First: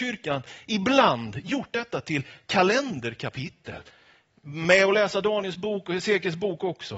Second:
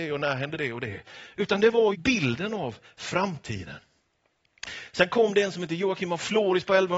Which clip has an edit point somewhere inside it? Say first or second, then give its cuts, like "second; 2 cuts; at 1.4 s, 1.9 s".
second; 1 cut; at 1.9 s